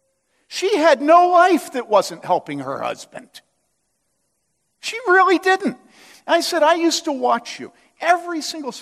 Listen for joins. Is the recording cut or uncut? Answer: uncut